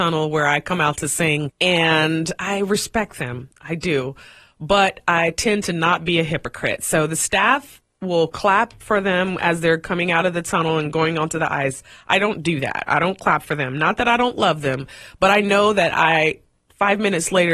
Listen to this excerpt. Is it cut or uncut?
uncut